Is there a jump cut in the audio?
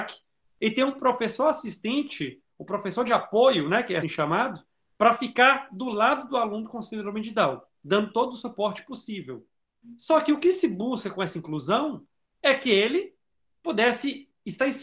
yes; 1 cut; at 4.0 s

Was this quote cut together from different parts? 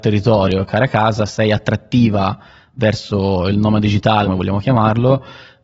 yes; 1 cut; at 4.2 s

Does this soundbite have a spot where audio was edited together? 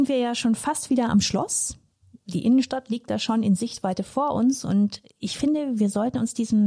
no; 0 cuts

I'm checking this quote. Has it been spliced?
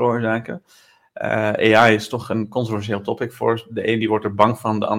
no; 0 cuts

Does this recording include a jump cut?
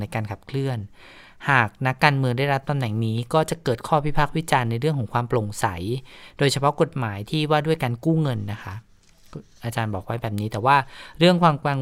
no; 0 cuts

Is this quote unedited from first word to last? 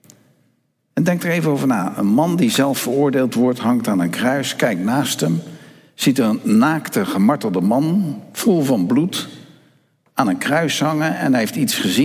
yes; 0 cuts

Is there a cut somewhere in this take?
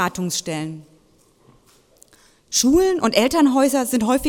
no; 0 cuts

